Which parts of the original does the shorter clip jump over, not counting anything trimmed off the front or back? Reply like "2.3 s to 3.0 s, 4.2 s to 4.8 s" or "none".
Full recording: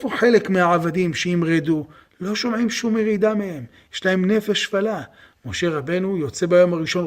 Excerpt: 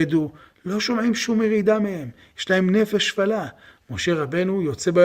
none